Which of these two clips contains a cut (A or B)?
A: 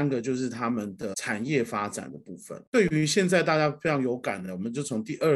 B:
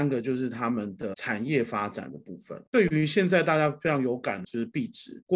B